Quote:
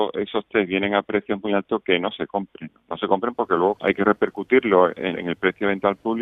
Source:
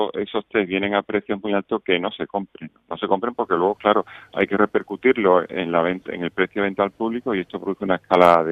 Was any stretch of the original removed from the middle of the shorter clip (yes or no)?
yes